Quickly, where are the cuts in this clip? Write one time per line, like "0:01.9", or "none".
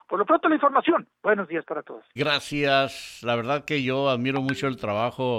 0:02.2